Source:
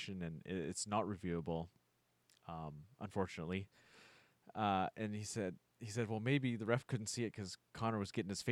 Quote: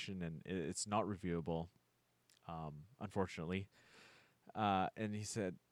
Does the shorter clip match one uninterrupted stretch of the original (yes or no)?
yes